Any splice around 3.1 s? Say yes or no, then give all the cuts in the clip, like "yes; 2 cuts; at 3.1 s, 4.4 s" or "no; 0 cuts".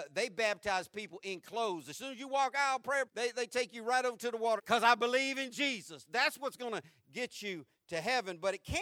yes; 2 cuts; at 3.1 s, 4.6 s